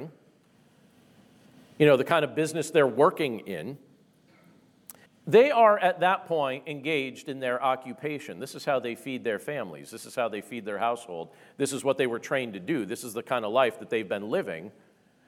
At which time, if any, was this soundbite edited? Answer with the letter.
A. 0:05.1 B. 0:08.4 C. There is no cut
A